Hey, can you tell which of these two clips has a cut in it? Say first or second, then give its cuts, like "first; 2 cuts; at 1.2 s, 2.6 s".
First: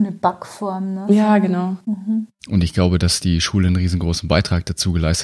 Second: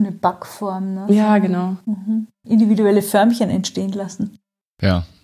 first; 1 cut; at 2.4 s